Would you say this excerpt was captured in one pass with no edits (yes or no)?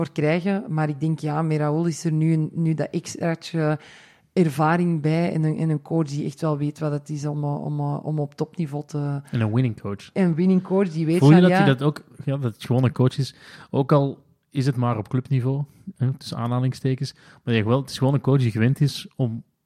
yes